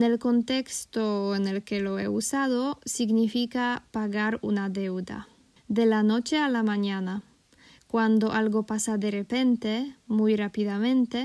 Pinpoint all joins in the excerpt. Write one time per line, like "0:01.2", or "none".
0:05.6